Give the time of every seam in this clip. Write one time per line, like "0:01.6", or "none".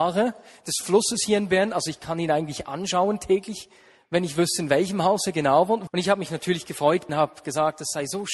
0:05.9
0:07.1